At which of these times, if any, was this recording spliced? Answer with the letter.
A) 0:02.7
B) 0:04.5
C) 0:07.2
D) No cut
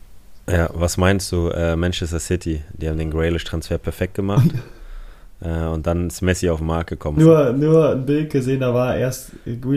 C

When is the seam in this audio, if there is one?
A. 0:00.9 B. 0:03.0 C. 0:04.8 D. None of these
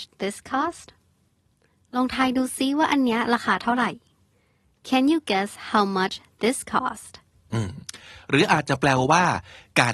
D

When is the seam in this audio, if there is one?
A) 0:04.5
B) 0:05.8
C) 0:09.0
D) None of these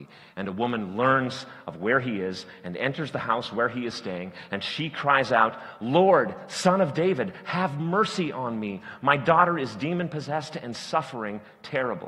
D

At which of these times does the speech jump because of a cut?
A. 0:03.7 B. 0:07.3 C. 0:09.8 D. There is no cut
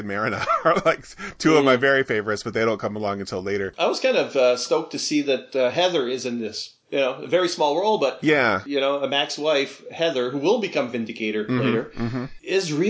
D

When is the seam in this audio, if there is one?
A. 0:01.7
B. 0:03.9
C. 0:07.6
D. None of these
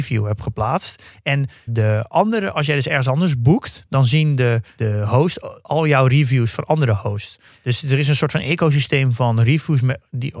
A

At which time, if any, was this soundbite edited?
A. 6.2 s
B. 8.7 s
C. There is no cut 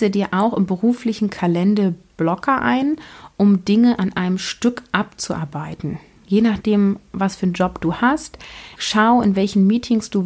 B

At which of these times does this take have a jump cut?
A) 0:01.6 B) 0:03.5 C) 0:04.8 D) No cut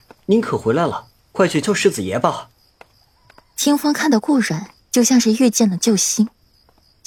A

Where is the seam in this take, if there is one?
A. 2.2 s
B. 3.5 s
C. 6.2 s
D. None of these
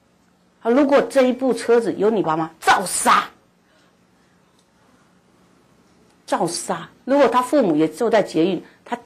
A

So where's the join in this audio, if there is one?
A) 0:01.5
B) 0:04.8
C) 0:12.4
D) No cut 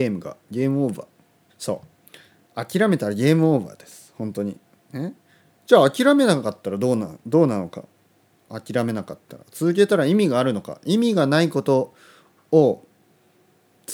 A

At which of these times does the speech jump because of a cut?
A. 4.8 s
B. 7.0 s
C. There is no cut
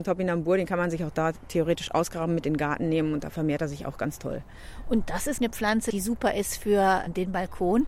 C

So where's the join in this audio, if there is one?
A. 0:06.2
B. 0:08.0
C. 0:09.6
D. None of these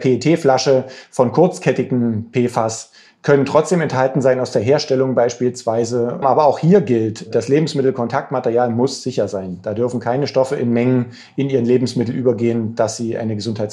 A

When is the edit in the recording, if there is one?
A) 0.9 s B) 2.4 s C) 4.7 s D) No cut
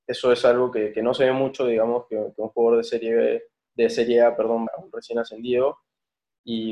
C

